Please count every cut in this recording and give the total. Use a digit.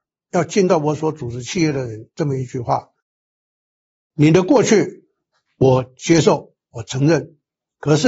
0